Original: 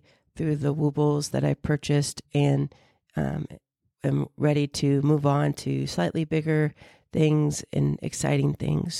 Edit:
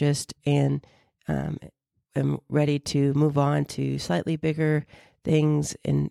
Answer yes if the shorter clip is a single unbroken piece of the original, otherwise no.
yes